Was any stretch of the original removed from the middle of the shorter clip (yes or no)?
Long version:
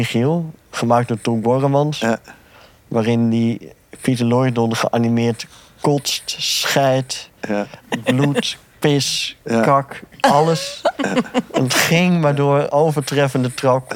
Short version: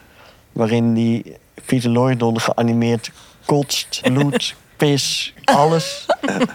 yes